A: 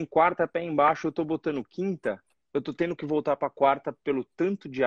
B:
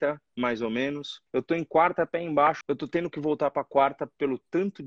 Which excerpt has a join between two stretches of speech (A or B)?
B